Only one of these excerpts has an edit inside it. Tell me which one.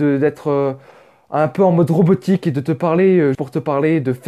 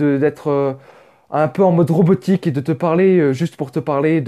first; 1 cut; at 3.3 s

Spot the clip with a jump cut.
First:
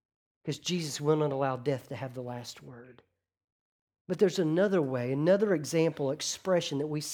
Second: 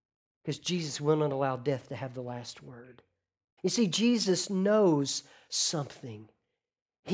second; 1 cut; at 3.6 s

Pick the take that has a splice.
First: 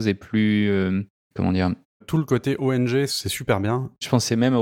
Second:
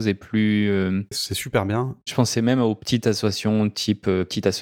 second; 1 cut; at 1.1 s

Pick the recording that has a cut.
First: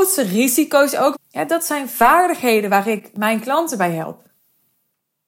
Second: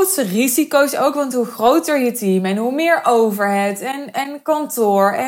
first; 1 cut; at 1.1 s

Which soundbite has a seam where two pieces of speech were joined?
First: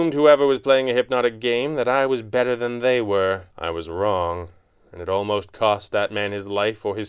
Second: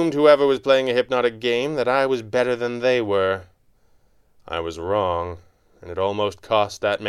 first; 1 cut; at 3.5 s

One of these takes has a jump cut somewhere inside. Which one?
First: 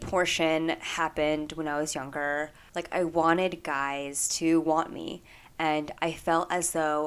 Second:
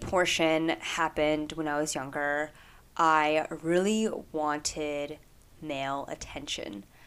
first; 1 cut; at 2.7 s

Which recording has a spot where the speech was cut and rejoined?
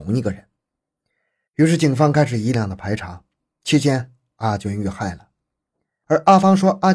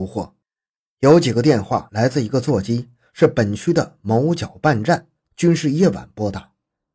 first; 2 cuts; at 1.5 s, 2.5 s

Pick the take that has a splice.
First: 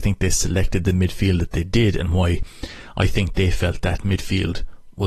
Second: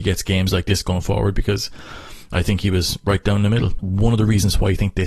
second; 1 cut; at 3.8 s

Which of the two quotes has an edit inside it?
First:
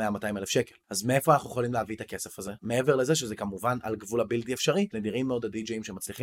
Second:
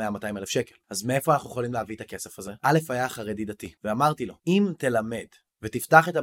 first; 2 cuts; at 2.6 s, 4.9 s

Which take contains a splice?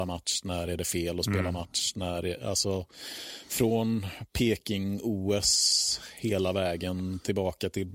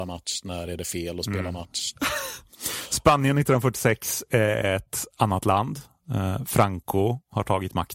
second; 1 cut; at 1.9 s

